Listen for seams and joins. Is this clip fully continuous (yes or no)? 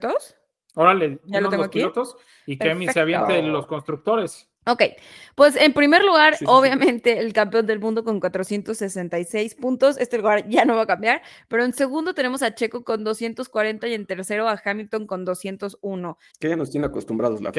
no